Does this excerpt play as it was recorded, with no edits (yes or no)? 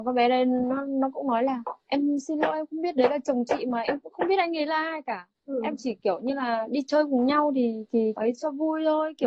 no